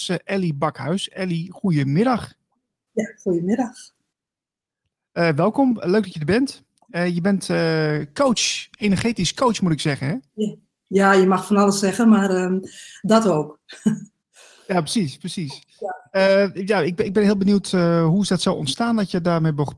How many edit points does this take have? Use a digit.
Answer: 1